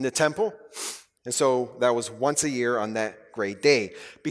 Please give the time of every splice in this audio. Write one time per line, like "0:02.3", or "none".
0:01.2